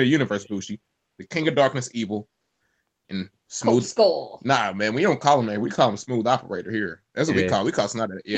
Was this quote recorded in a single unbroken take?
yes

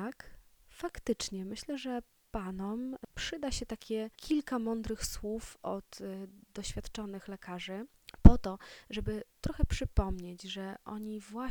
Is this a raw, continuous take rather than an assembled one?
no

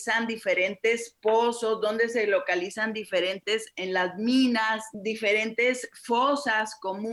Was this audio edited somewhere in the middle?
no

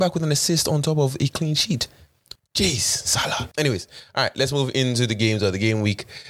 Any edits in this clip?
yes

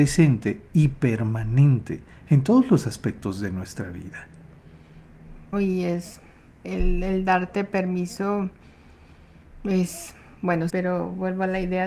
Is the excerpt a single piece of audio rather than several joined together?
no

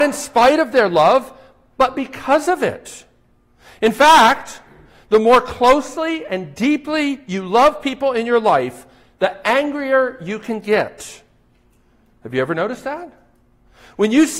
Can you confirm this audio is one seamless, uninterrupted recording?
yes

